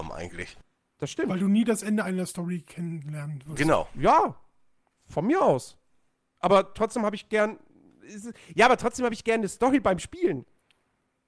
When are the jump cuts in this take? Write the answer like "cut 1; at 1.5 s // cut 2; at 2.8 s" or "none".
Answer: none